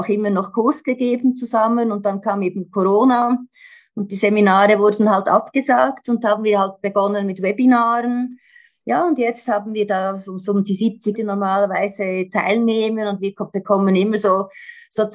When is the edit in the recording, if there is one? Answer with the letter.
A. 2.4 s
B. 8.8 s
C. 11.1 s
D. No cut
C